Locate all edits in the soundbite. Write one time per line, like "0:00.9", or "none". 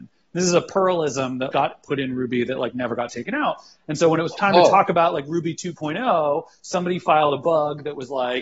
0:01.5